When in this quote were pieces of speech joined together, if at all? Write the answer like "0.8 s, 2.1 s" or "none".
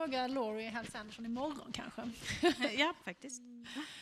3.0 s